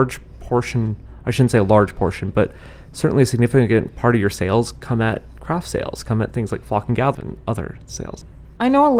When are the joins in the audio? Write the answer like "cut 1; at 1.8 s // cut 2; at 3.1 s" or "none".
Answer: cut 1; at 7.1 s